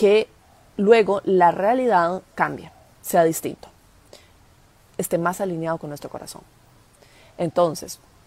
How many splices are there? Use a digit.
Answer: 1